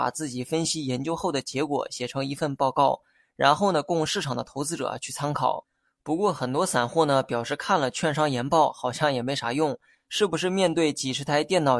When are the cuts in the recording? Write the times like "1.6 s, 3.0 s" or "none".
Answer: 9.9 s

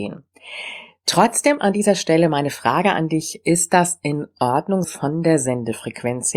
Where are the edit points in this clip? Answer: 4.8 s

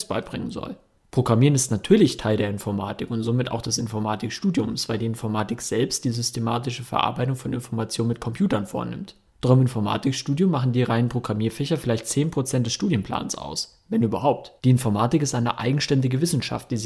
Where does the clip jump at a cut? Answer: 1.0 s, 14.6 s

